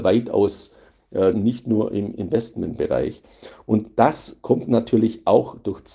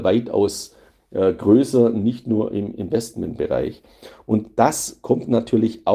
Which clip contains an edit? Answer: first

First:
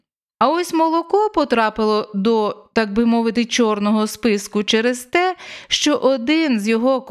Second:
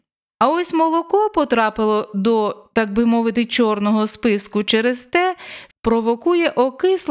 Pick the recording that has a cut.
second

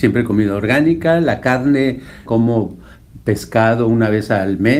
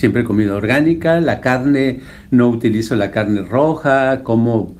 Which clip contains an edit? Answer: first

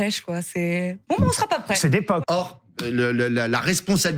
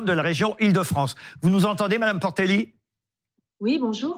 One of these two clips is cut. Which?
first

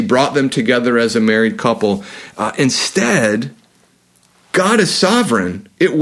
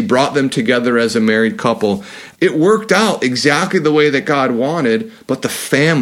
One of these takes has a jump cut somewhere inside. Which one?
second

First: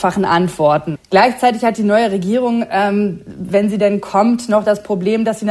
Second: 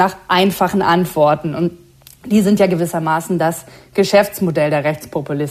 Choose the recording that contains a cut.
first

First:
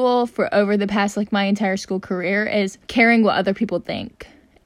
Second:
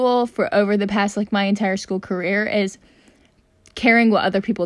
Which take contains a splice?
first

